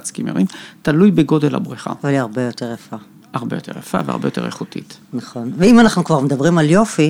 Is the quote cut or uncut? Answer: uncut